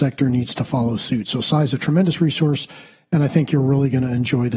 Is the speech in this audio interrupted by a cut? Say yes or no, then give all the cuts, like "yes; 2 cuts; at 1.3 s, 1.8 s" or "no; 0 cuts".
no; 0 cuts